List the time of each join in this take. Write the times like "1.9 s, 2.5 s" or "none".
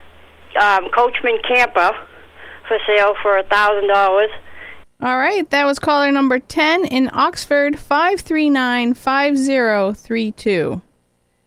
4.8 s